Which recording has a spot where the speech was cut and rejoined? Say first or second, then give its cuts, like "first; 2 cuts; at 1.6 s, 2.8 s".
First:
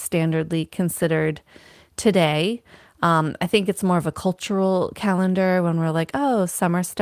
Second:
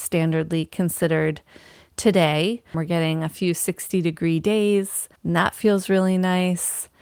second; 2 cuts; at 2.7 s, 5.2 s